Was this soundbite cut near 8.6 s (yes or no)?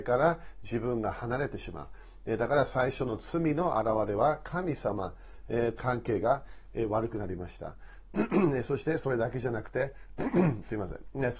no